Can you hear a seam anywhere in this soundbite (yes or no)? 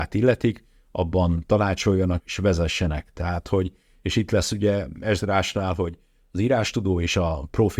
yes